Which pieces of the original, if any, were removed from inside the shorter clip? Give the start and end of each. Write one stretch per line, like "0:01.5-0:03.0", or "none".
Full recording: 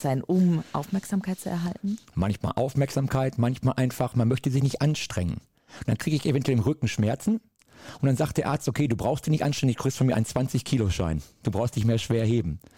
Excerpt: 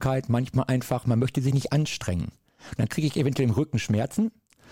none